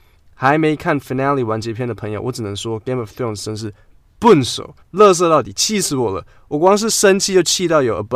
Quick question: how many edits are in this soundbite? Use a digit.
1